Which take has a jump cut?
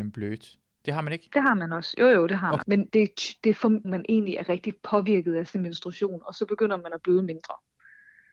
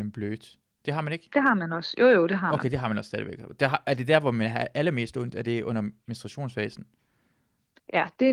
first; 2 cuts; at 2.6 s, 3.8 s

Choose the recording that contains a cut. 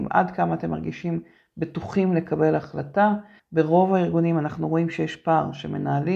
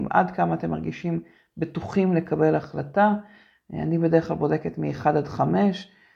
first; 1 cut; at 3.4 s

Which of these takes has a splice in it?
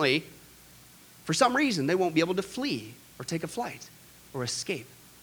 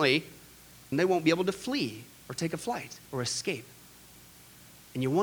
second; 2 cuts; at 0.9 s, 3.0 s

